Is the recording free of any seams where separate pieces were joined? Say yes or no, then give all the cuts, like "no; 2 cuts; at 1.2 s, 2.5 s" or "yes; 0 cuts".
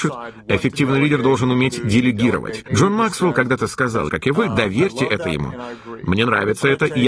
no; 2 cuts; at 2.7 s, 4.1 s